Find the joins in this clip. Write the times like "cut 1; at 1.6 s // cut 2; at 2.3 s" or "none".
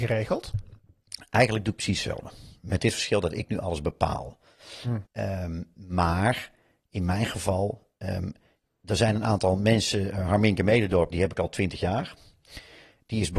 cut 1; at 5.1 s // cut 2; at 11.1 s